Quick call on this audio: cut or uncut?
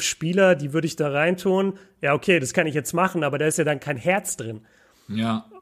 uncut